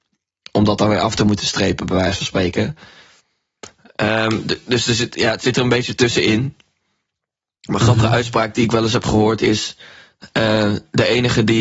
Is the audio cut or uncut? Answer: uncut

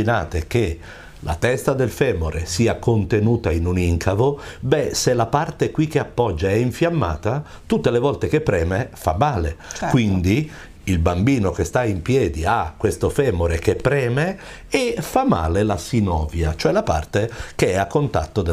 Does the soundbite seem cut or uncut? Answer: uncut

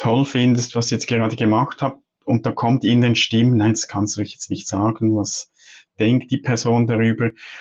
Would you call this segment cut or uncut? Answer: uncut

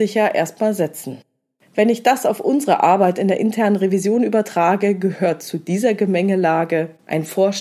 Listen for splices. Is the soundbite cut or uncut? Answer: cut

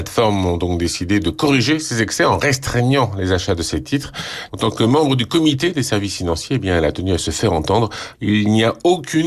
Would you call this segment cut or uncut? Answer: cut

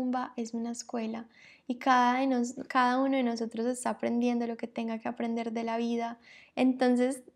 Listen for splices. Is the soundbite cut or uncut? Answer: uncut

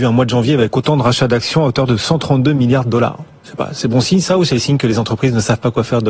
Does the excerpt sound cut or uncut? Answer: uncut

